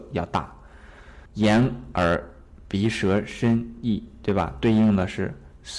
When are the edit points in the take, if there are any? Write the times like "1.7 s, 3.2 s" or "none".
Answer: 1.3 s